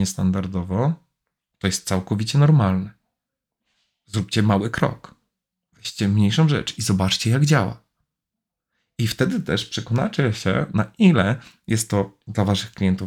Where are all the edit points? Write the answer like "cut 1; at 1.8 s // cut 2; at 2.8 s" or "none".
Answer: none